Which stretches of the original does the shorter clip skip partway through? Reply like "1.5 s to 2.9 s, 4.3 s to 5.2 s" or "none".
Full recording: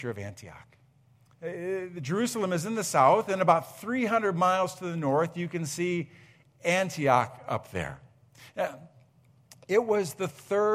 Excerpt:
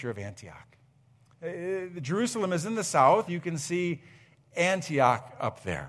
3.3 s to 5.3 s